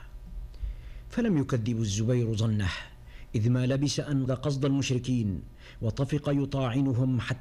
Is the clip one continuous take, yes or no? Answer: no